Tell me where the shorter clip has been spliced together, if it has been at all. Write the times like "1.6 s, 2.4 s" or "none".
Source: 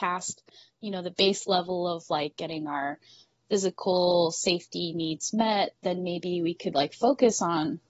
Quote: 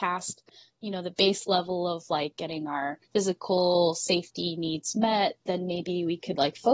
3.0 s